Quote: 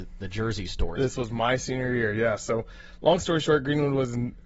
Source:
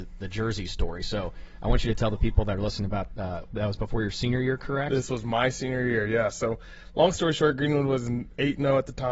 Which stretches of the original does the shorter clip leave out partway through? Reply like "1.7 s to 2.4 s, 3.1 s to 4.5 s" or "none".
1.0 s to 4.9 s